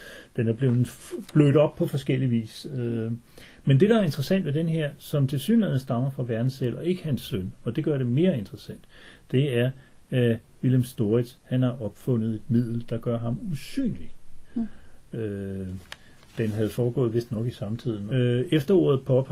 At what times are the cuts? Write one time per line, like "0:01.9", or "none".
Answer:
0:15.1
0:18.1

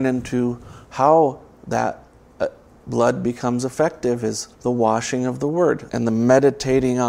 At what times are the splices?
0:04.5
0:05.9

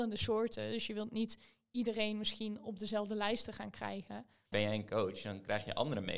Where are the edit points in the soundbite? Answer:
0:04.5

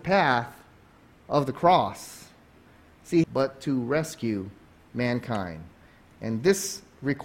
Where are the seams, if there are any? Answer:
0:03.2

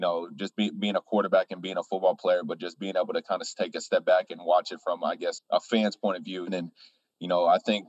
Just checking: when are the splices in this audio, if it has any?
0:05.4
0:06.5

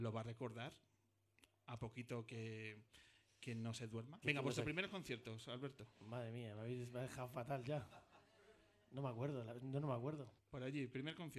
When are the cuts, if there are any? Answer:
0:04.2
0:05.9
0:10.4

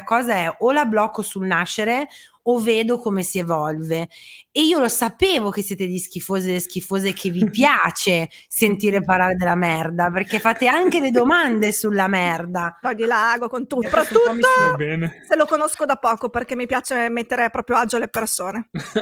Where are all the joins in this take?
0:12.8
0:13.8

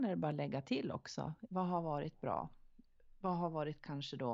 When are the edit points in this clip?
0:01.5

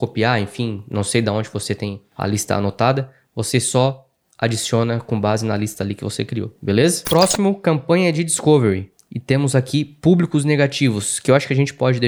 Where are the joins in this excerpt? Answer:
0:07.0

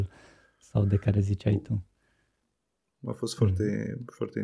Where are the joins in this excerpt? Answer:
0:03.0

